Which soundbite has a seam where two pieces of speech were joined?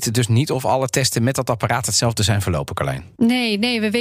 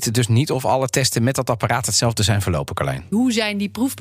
second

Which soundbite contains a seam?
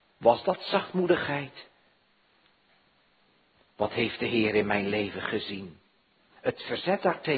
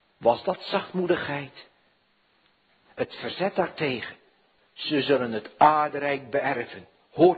second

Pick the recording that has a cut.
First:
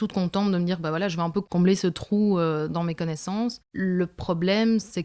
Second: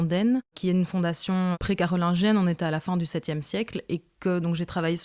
first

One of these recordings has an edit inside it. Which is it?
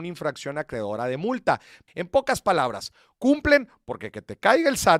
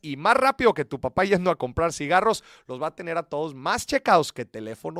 first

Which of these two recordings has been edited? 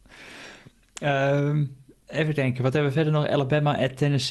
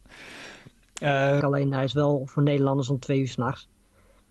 second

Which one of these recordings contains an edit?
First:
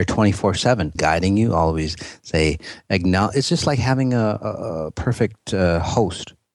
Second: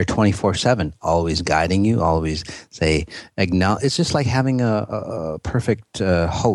first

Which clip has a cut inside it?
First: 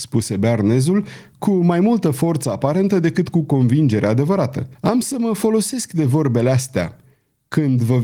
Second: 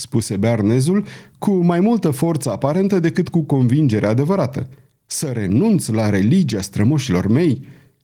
first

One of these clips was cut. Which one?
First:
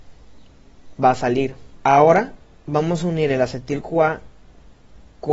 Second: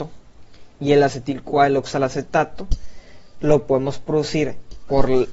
first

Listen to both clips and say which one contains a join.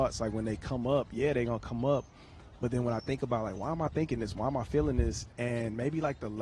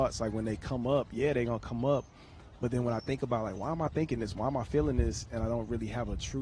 first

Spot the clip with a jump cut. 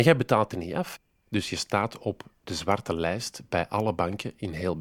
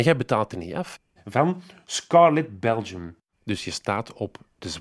second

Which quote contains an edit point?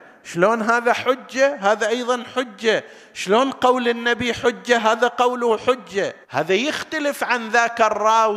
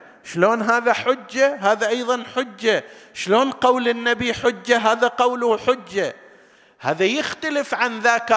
first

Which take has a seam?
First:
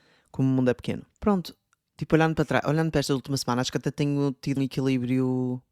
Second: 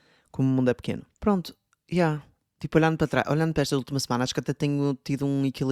first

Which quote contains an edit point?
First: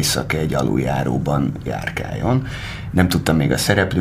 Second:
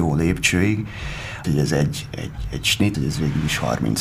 second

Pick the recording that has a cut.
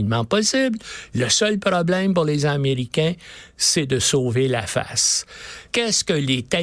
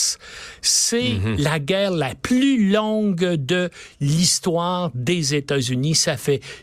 first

